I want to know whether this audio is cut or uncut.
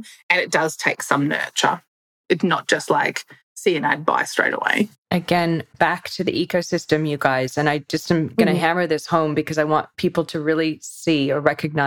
uncut